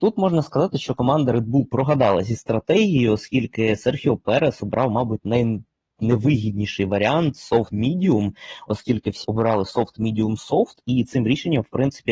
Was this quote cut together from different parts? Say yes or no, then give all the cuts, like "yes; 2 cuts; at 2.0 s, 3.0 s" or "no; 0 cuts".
yes; 2 cuts; at 7.7 s, 9.2 s